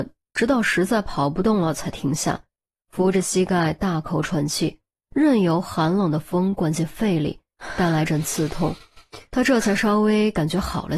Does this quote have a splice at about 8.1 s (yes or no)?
yes